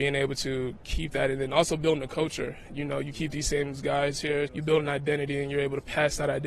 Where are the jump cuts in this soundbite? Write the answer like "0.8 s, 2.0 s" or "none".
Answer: 4.5 s

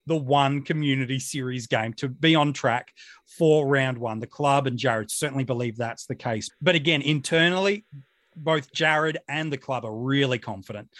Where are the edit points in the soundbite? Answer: 6.5 s

